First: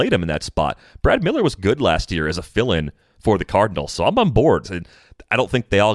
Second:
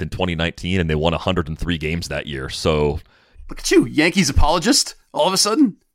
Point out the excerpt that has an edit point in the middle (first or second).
first